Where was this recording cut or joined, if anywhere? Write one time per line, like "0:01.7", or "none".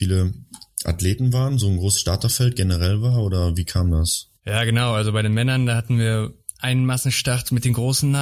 0:04.4